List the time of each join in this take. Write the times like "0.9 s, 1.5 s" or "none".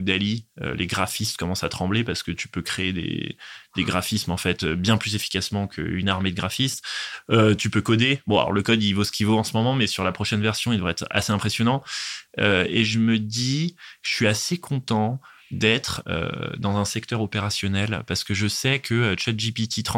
none